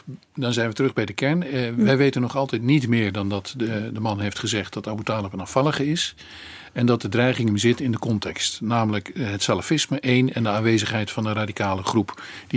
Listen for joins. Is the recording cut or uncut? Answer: uncut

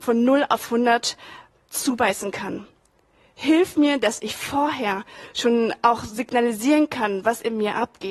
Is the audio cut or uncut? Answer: uncut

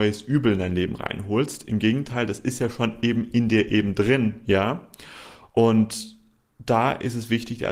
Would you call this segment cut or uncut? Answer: uncut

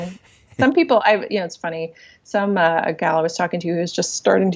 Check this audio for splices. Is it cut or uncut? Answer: uncut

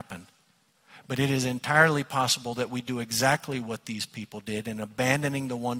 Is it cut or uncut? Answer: uncut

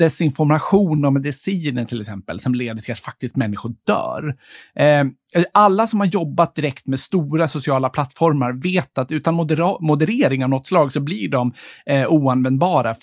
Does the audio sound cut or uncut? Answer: uncut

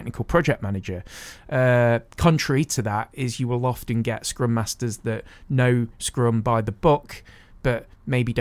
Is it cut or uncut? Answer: uncut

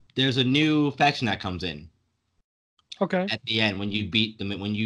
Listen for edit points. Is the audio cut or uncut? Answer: uncut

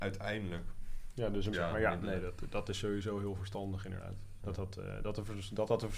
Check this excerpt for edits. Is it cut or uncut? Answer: cut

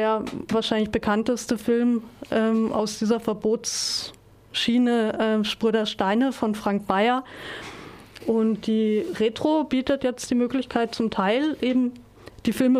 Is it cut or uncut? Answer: cut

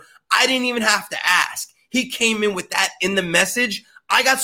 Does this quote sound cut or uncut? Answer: uncut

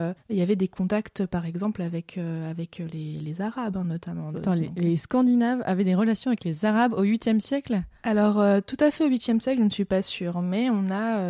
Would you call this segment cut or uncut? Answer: cut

